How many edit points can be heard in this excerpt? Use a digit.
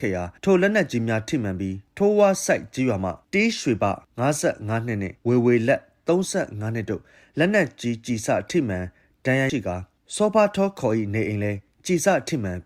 1